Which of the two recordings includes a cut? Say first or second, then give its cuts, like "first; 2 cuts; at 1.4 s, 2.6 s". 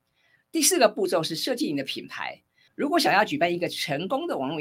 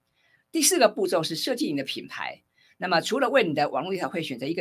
first; 1 cut; at 2.7 s